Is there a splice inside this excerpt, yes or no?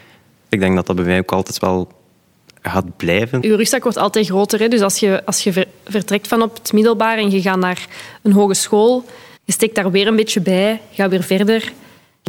yes